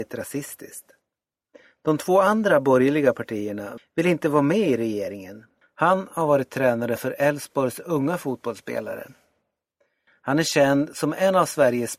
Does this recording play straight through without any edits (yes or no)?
no